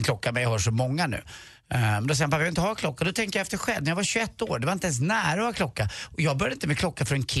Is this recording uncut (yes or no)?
yes